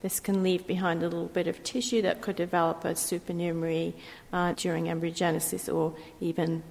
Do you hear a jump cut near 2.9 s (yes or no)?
no